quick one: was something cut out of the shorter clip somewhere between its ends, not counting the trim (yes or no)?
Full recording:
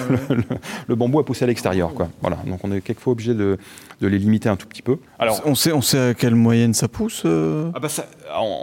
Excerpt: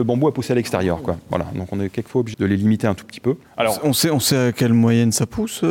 yes